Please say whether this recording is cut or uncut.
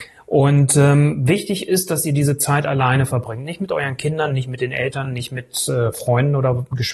uncut